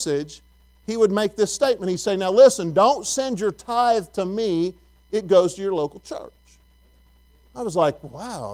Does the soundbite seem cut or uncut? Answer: uncut